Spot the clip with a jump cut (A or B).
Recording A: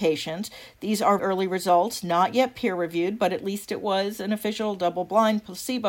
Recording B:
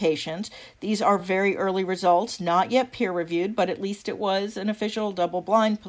A